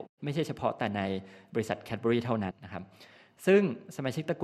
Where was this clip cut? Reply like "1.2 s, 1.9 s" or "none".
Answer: 2.5 s